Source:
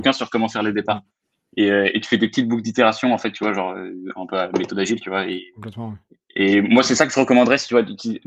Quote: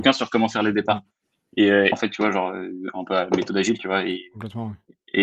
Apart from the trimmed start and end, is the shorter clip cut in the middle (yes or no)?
yes